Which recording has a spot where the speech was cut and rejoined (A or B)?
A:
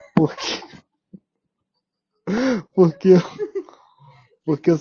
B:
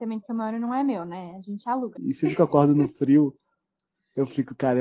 B